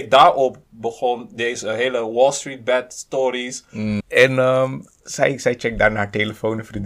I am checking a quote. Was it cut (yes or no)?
yes